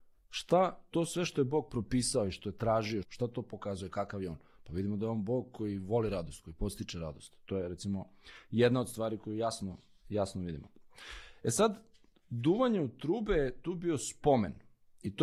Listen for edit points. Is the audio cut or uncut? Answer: cut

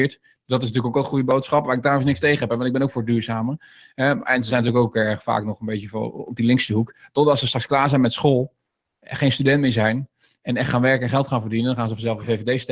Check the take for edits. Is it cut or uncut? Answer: uncut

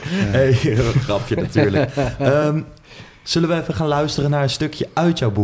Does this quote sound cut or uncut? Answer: uncut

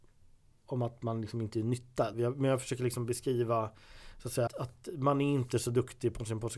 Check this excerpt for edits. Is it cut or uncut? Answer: cut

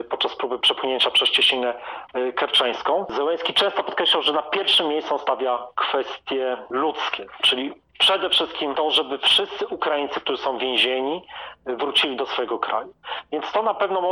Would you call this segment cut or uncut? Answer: uncut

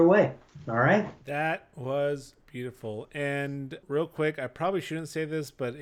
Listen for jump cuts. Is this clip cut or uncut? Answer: cut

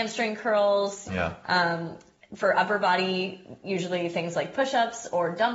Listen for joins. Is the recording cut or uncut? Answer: cut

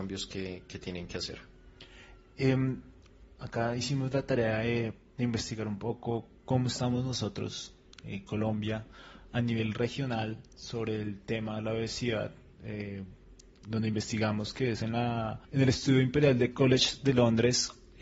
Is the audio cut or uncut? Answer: cut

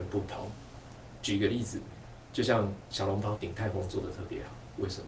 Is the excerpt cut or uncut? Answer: cut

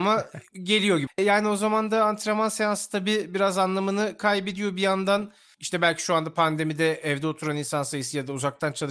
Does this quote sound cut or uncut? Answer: cut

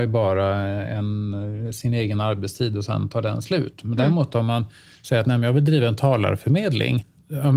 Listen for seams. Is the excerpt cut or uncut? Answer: uncut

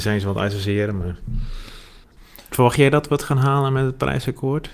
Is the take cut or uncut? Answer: uncut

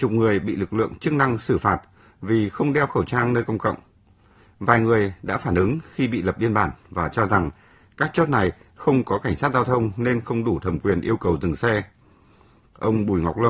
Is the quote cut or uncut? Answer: uncut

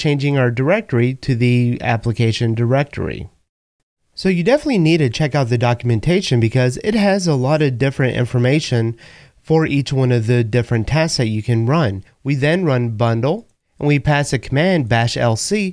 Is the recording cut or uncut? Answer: cut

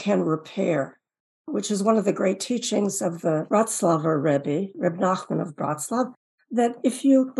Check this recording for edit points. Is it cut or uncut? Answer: uncut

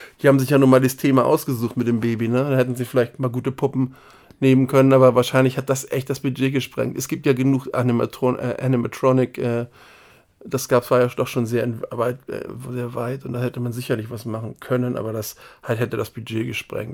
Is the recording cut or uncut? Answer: uncut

